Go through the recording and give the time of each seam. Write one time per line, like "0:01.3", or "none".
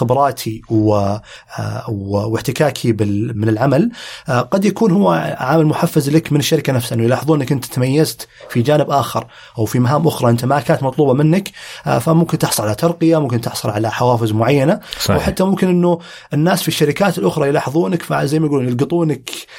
0:03.3